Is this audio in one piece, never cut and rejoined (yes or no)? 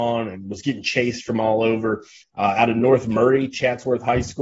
no